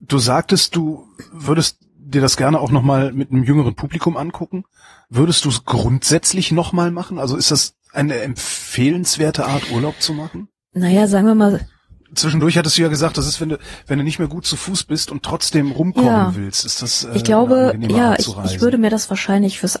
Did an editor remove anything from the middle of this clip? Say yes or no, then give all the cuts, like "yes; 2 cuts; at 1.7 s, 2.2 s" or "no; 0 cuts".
no; 0 cuts